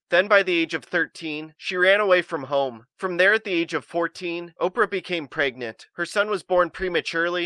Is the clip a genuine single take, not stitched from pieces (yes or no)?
yes